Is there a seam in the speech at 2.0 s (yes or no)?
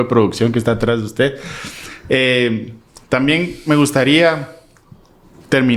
no